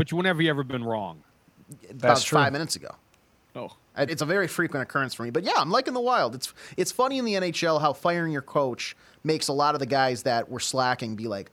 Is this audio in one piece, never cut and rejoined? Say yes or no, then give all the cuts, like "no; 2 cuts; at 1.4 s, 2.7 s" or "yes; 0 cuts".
no; 1 cut; at 4.1 s